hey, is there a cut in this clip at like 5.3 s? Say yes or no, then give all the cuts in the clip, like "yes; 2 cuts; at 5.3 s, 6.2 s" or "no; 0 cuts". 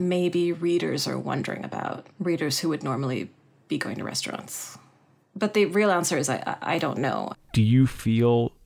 no; 1 cut; at 7.3 s